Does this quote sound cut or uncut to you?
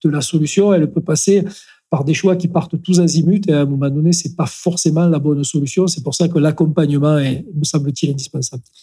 uncut